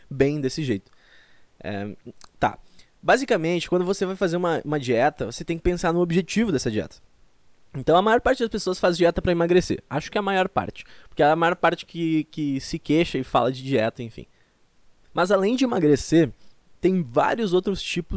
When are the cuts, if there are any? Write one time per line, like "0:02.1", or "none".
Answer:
none